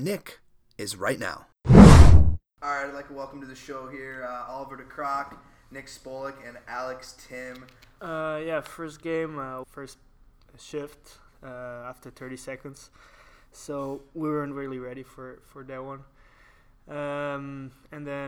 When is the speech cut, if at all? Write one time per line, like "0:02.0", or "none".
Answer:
0:08.0
0:09.6